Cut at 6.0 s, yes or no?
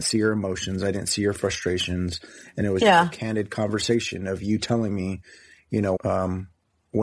yes